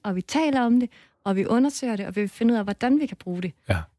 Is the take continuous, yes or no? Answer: yes